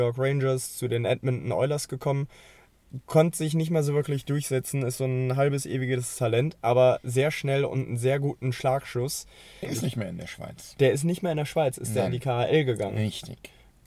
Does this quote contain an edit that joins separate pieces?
yes; 1 cut; at 9.6 s

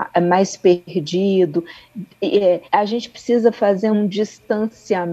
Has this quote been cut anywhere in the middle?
yes; 2 cuts; at 2.7 s, 3.9 s

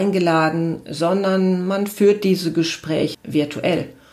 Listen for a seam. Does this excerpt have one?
yes; 1 cut; at 3.1 s

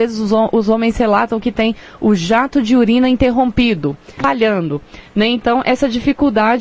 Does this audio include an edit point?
yes; 1 cut; at 4.2 s

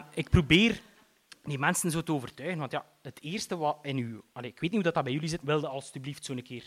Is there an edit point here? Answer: yes; 1 cut; at 5.4 s

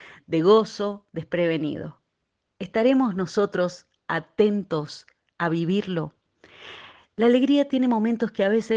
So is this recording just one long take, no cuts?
yes; 0 cuts

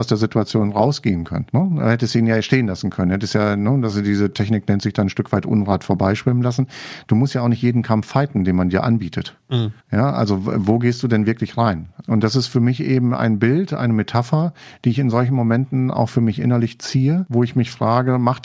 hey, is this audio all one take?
no; 2 cuts; at 9.8 s, 12.0 s

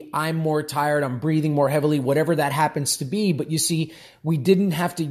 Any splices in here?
no; 0 cuts

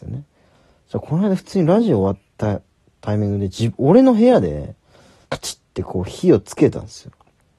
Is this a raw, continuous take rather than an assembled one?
no; 1 cut; at 5.2 s

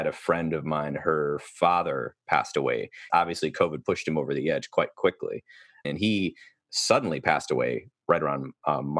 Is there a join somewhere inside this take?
yes; 2 cuts; at 3.1 s, 5.8 s

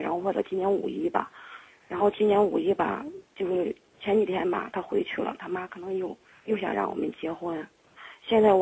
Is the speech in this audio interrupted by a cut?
no; 0 cuts

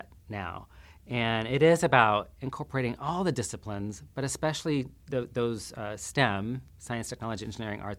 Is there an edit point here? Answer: yes; 1 cut; at 5.0 s

